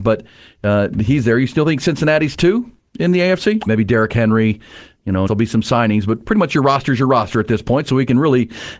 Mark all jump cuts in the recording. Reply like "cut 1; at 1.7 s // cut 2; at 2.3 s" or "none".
cut 1; at 3.7 s // cut 2; at 5.3 s